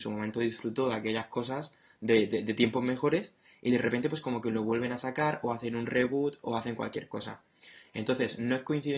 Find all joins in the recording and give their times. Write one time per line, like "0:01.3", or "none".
none